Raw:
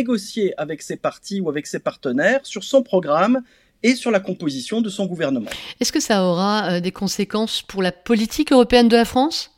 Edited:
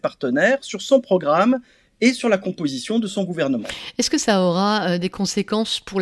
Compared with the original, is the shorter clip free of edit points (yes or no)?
yes